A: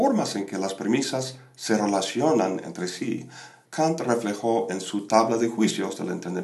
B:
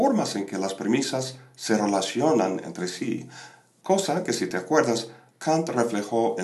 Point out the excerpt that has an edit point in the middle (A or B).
A